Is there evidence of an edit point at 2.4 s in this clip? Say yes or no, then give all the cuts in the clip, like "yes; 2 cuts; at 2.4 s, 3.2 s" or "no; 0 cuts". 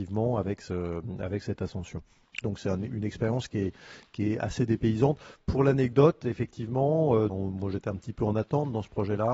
yes; 2 cuts; at 2.4 s, 7.3 s